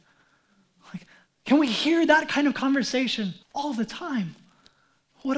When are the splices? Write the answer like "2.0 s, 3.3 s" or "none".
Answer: 1.3 s, 3.4 s